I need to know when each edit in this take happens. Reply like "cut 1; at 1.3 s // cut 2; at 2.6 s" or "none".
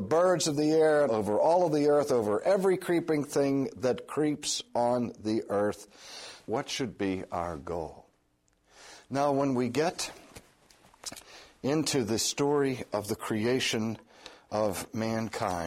cut 1; at 1.1 s // cut 2; at 6.4 s